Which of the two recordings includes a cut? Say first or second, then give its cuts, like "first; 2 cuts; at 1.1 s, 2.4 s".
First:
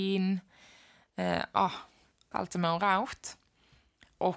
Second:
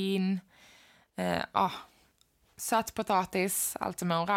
first; 1 cut; at 2.3 s